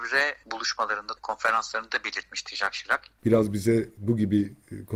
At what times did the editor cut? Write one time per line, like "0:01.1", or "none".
0:01.2
0:03.2

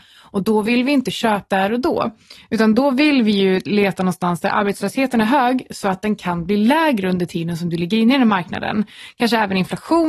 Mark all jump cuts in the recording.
0:01.5

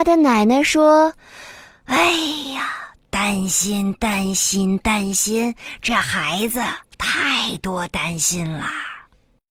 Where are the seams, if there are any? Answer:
none

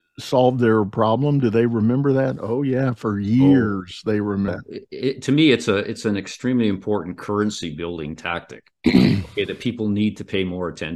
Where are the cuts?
0:04.5

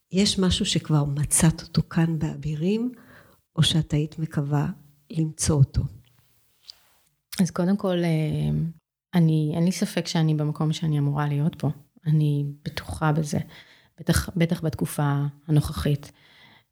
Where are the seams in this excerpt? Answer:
none

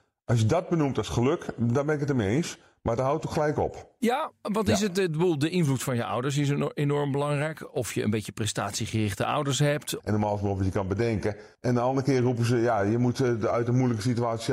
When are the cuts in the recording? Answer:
0:10.0
0:11.5

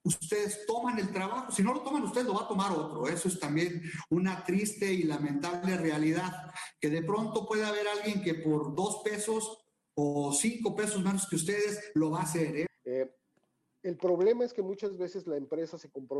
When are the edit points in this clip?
0:12.7

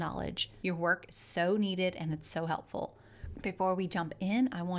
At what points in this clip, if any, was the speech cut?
0:03.3

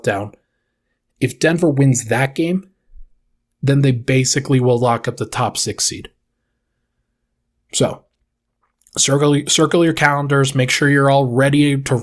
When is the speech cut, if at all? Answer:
none

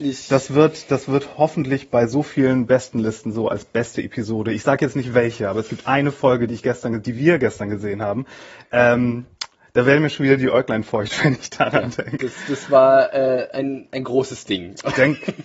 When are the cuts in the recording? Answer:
0:13.5

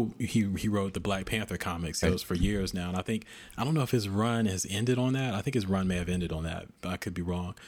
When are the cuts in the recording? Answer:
0:02.0

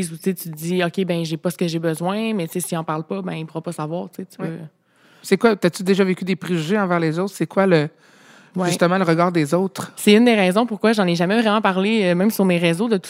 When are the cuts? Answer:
none

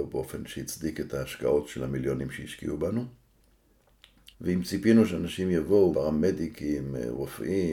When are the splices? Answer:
0:04.3
0:05.9

